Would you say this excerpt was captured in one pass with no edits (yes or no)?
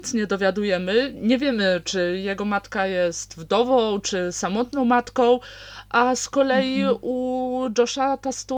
yes